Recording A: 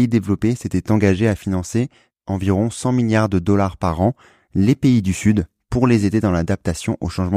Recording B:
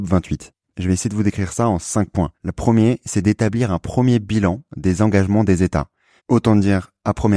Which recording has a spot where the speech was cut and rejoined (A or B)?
B